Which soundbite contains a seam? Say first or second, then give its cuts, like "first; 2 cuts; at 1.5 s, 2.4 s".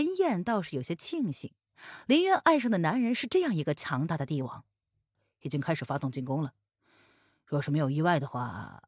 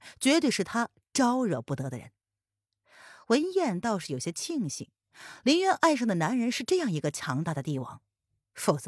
first; 1 cut; at 5.1 s